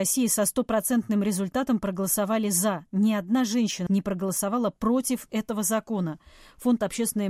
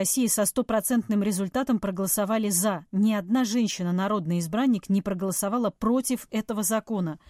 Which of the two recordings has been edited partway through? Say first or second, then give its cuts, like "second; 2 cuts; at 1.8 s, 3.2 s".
first; 1 cut; at 3.9 s